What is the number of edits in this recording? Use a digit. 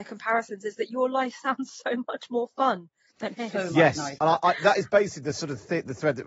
0